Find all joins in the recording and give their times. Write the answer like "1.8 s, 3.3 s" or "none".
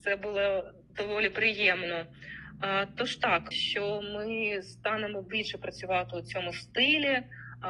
3.5 s